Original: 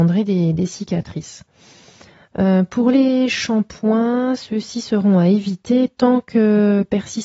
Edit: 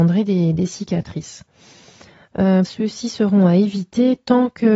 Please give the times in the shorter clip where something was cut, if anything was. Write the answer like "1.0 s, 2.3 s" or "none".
2.6 s